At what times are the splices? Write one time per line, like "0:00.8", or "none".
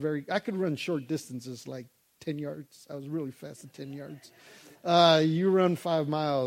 none

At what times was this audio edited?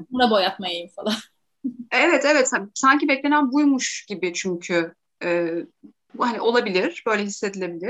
0:06.1

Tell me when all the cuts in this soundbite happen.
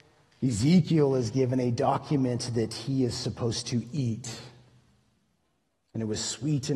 none

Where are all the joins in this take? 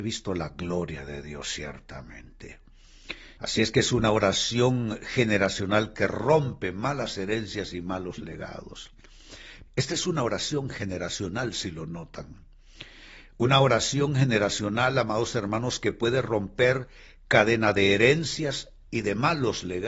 0:03.4
0:09.7

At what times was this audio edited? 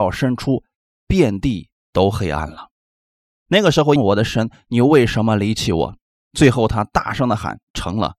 0:04.0

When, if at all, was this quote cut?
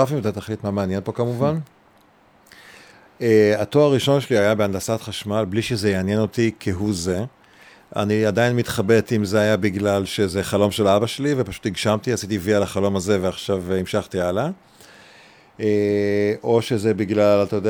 none

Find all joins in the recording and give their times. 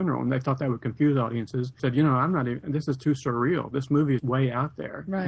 0:01.8
0:04.2

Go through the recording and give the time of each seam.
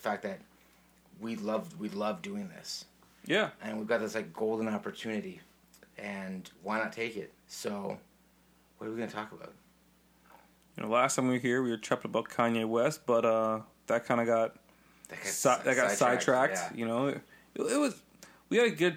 0:07.4

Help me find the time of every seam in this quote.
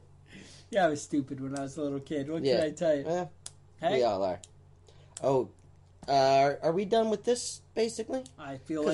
none

